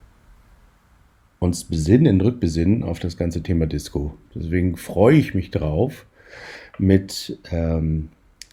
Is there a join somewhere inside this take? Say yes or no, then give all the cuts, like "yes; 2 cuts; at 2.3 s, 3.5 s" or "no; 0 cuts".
no; 0 cuts